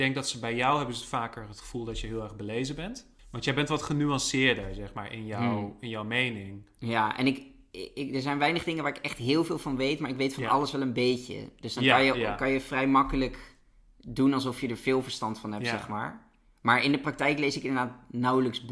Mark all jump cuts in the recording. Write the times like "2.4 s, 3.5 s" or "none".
3.2 s